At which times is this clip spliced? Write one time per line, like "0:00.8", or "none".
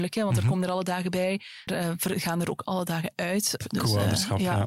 0:01.7
0:03.6